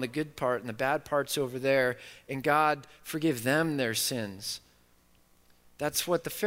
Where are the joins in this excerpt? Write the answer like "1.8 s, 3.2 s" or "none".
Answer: none